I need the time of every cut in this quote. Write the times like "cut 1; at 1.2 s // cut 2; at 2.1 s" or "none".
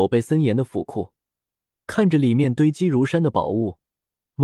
none